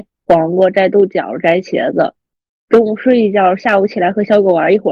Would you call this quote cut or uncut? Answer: uncut